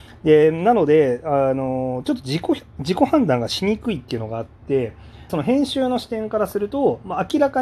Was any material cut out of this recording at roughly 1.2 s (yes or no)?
no